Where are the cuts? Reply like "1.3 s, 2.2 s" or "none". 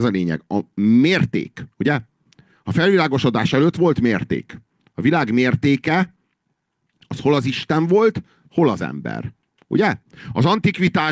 1.7 s